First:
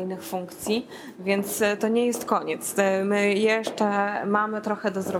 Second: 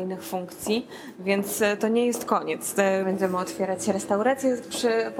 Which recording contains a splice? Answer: second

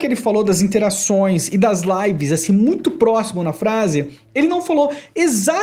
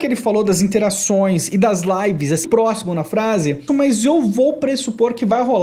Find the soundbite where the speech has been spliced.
second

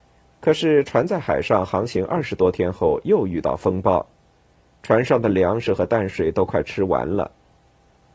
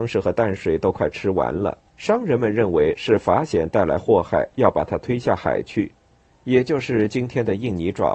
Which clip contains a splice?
second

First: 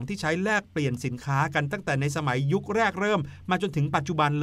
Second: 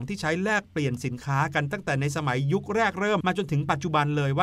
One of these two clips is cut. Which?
second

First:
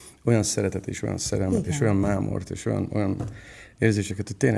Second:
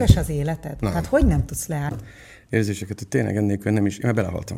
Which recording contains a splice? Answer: second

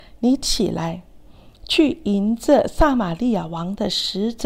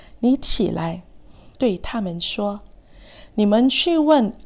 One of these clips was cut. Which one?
second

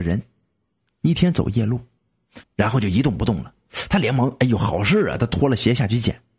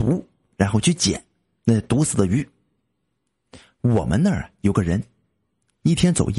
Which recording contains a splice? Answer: first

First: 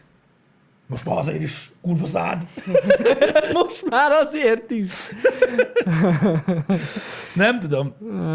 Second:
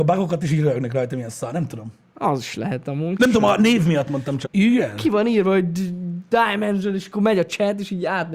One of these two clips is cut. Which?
second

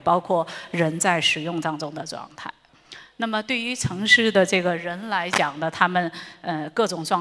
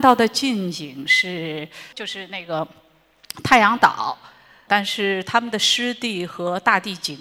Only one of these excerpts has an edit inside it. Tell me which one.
second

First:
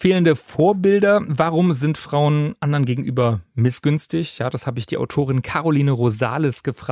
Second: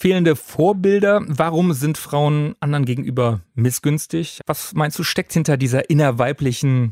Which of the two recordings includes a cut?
second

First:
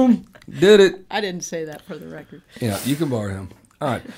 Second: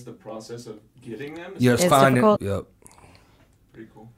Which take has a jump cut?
second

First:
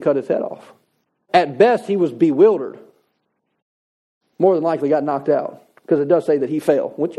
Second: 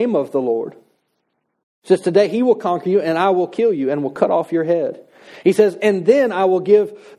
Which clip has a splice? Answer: first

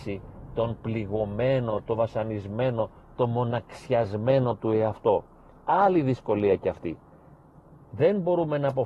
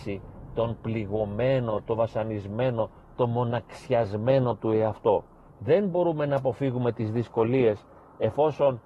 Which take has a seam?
second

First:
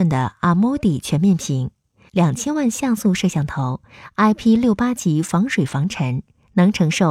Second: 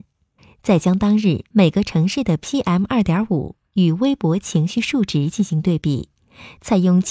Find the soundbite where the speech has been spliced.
first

